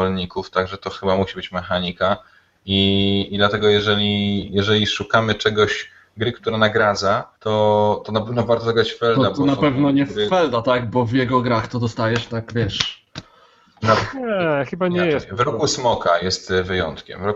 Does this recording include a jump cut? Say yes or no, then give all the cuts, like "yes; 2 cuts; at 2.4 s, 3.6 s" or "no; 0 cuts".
yes; 1 cut; at 7.4 s